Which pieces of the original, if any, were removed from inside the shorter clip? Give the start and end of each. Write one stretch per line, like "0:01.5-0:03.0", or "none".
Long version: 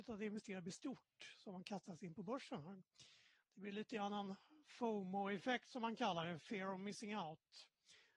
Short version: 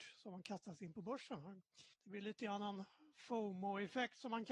0:03.1-0:03.4